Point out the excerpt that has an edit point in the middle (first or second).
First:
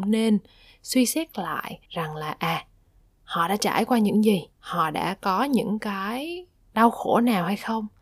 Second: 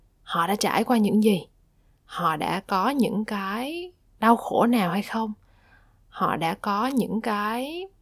first